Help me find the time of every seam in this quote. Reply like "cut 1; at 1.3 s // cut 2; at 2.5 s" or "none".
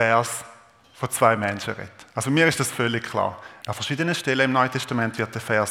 cut 1; at 3.6 s